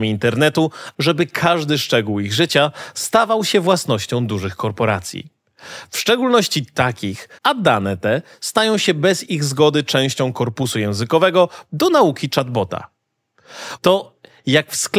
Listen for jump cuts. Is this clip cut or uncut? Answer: cut